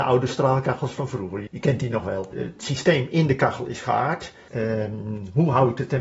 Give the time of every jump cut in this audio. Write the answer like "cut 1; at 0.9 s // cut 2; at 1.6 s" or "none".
cut 1; at 1.5 s // cut 2; at 4.5 s